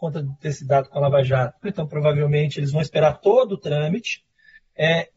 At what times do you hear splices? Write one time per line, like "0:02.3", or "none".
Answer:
0:01.6